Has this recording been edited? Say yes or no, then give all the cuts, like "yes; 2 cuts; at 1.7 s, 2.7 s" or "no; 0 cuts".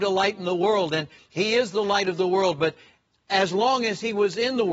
no; 0 cuts